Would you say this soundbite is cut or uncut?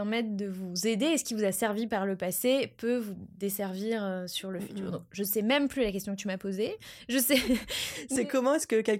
uncut